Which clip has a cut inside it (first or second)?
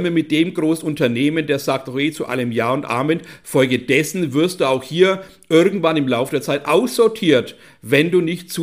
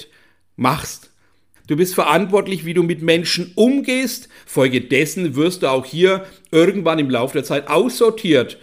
second